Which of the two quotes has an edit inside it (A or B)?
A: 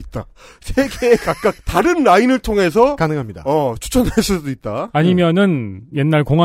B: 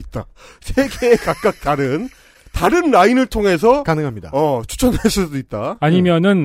A